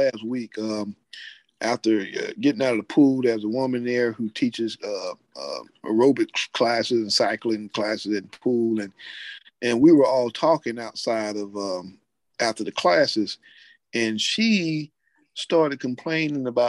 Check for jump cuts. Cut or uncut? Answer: uncut